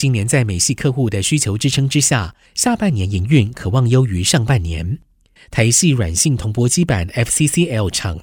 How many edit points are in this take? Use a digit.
2